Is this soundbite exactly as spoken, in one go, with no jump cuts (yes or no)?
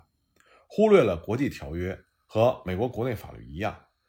yes